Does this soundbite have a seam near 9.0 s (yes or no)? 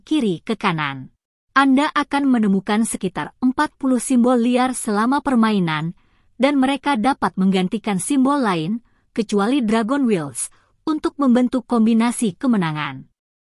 no